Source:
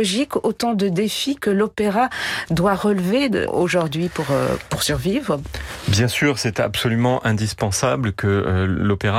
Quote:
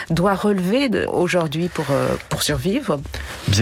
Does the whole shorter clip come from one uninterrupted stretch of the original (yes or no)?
yes